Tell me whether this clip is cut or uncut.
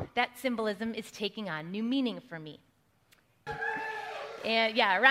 cut